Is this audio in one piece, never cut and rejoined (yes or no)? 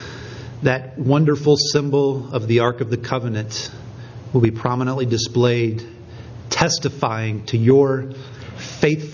yes